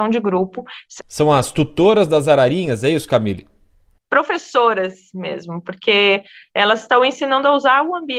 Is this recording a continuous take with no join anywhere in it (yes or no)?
no